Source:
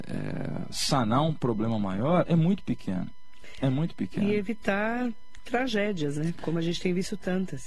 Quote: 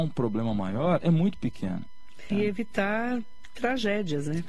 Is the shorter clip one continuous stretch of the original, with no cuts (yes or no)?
no